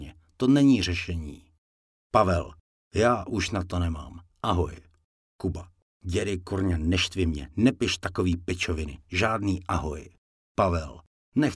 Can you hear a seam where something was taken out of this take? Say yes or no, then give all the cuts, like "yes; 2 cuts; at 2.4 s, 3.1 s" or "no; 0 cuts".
no; 0 cuts